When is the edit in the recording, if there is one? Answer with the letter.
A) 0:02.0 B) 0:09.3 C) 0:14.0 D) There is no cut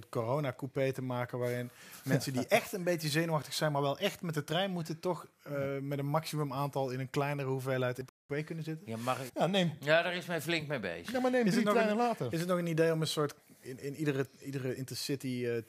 B